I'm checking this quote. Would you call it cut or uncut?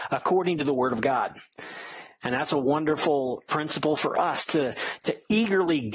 uncut